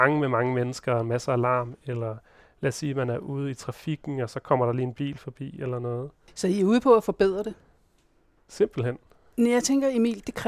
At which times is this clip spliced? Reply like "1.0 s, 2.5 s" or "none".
none